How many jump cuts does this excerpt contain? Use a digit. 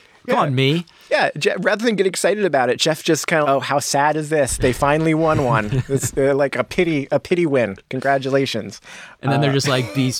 1